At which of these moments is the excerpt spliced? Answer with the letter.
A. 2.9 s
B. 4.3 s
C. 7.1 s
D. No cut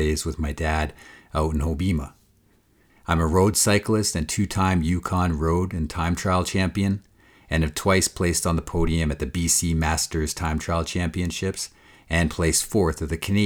A